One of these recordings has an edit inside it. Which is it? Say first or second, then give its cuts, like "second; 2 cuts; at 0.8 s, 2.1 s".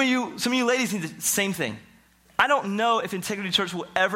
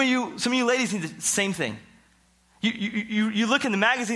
first; 1 cut; at 2.3 s